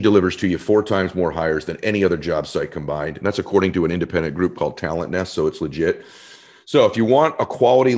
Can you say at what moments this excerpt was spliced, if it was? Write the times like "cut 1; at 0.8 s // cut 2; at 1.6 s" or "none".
none